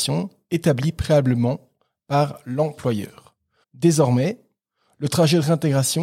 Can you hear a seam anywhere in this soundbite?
yes; 1 cut; at 3.6 s

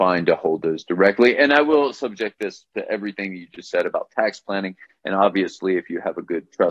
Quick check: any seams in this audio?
no; 0 cuts

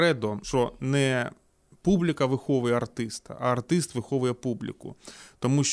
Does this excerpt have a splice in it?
no; 0 cuts

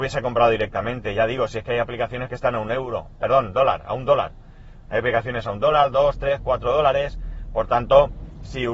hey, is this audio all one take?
yes; 0 cuts

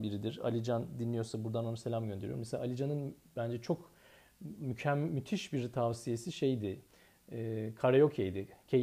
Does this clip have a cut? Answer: no; 0 cuts

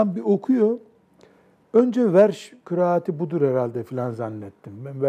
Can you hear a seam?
yes; 1 cut; at 1.6 s

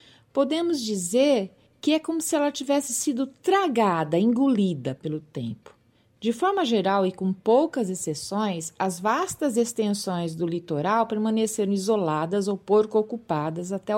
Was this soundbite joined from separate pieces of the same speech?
no; 0 cuts

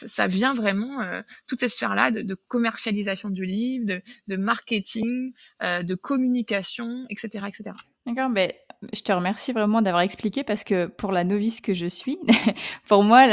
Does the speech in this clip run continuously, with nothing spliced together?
yes; 0 cuts

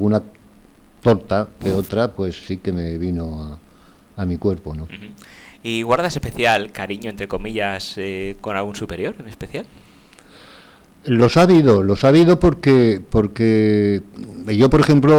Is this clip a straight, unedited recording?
yes; 0 cuts

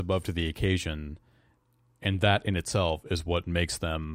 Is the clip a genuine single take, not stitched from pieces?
yes; 0 cuts

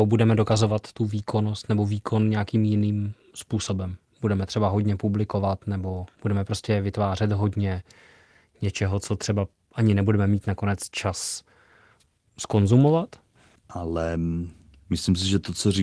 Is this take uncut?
no; 1 cut; at 13.6 s

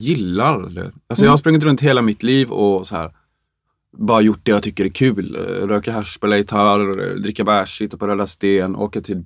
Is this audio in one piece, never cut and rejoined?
yes; 0 cuts

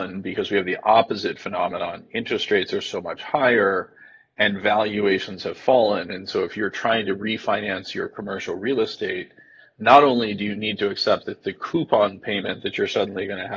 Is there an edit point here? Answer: no; 0 cuts

